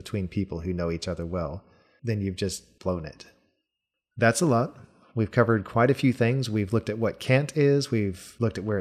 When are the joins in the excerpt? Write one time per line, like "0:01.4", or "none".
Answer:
0:02.0

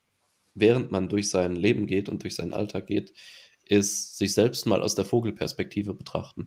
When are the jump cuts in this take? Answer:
none

